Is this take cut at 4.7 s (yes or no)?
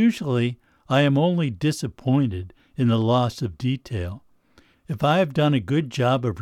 yes